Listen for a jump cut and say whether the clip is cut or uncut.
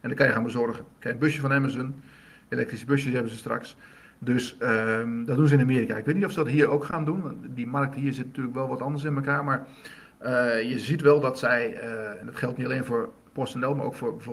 uncut